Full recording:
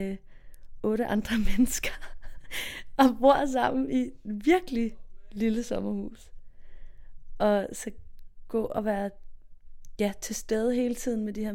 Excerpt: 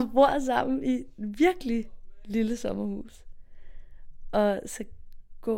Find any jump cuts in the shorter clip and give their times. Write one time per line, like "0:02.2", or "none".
none

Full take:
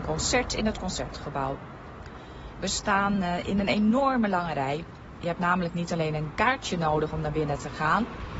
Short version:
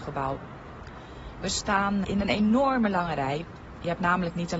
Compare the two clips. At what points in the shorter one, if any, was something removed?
0:02.0

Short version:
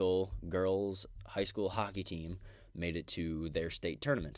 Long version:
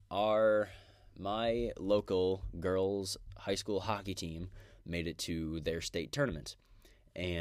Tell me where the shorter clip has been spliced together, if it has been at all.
none

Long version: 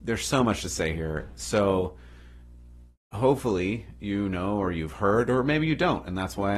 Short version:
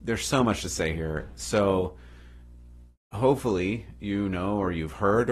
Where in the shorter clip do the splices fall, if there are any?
none

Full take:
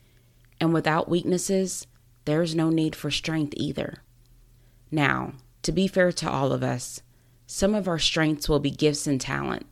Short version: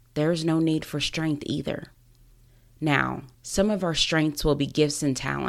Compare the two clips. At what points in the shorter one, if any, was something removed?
0:03.3

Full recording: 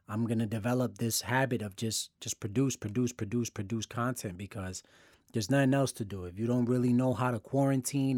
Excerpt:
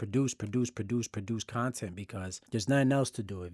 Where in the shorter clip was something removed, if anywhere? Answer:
0:02.5

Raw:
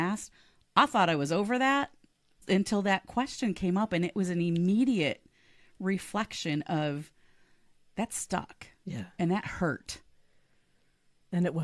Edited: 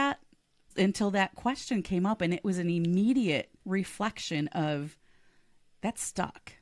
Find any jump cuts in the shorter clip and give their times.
0:03.6

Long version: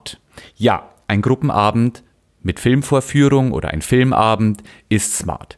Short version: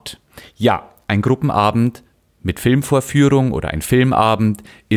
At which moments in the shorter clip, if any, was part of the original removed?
none

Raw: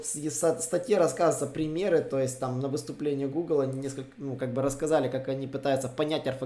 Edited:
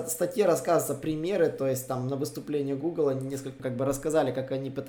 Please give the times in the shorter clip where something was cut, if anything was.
0:03.6

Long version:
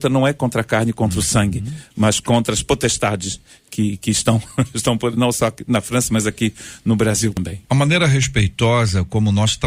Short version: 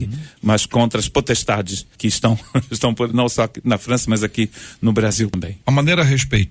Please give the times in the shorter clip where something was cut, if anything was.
0:01.9

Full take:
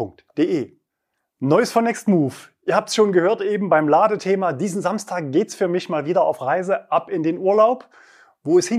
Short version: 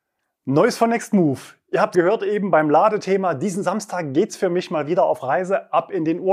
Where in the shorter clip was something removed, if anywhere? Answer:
0:01.9

